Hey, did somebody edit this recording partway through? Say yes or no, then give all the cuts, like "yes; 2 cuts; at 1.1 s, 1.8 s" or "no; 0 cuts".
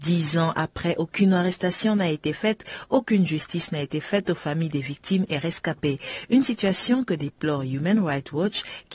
no; 0 cuts